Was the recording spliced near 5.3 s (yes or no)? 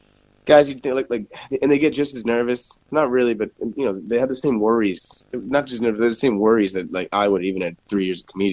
no